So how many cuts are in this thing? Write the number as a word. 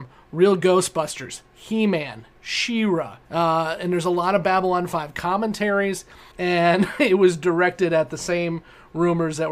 two